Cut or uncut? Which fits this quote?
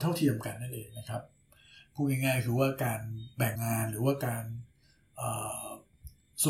cut